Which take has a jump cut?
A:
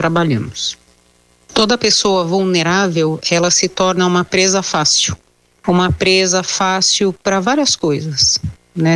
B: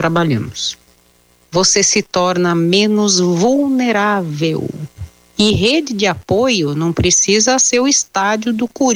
B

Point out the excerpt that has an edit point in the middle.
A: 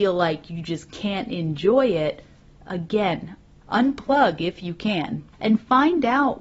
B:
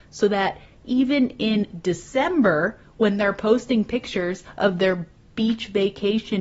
A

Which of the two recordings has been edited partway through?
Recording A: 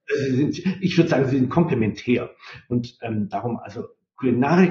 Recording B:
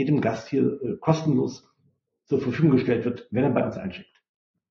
A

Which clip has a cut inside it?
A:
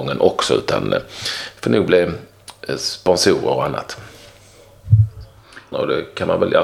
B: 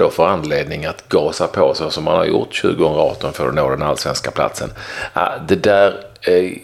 A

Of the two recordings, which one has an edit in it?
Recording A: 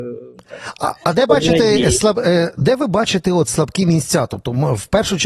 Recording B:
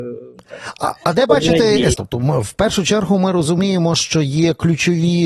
B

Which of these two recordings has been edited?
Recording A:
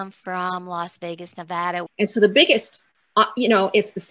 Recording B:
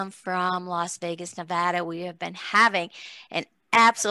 A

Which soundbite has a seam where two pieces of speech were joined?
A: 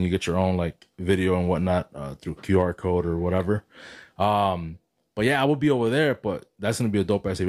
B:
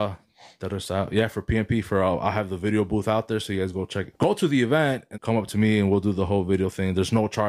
B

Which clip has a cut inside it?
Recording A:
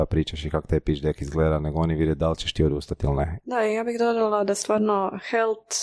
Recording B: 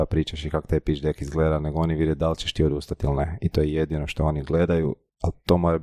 A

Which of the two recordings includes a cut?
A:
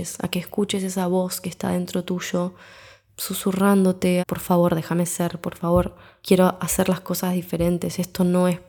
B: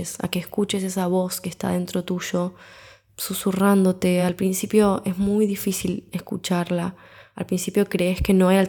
A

